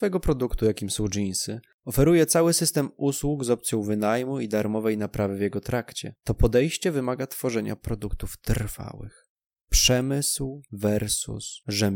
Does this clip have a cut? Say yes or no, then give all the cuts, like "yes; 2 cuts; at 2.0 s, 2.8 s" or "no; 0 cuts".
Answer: no; 0 cuts